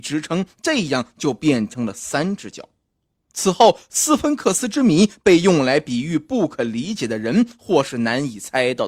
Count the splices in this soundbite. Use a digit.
1